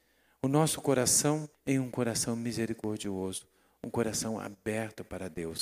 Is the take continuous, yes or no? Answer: no